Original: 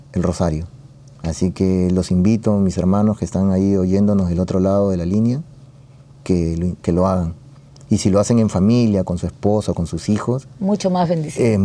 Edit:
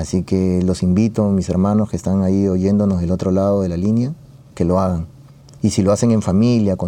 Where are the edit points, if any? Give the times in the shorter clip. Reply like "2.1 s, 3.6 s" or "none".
4.5 s